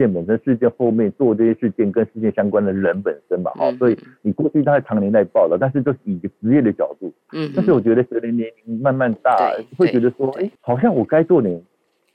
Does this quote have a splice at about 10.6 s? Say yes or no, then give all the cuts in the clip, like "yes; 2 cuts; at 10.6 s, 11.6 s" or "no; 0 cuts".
yes; 1 cut; at 10.6 s